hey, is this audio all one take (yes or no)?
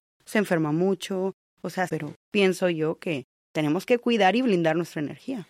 no